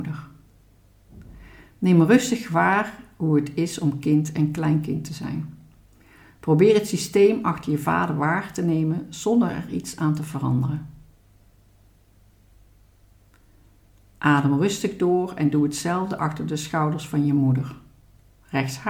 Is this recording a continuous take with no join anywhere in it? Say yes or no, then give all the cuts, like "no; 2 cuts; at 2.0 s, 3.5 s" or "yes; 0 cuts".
yes; 0 cuts